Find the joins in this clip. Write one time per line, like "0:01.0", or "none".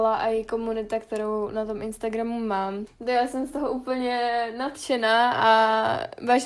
0:02.9